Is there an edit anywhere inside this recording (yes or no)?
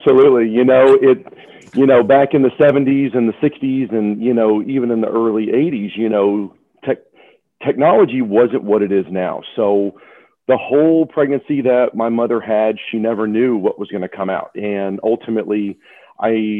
no